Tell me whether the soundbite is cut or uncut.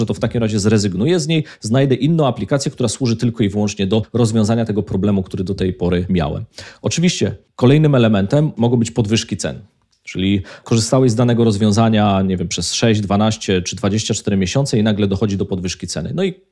uncut